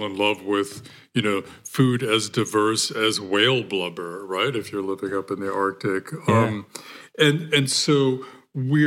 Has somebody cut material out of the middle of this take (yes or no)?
no